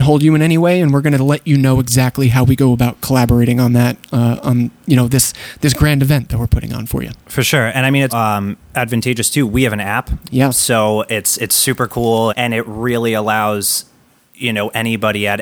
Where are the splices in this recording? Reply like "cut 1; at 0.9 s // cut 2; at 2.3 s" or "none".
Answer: cut 1; at 8.1 s // cut 2; at 12.3 s